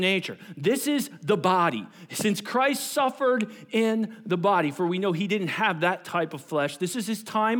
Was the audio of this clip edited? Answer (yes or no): no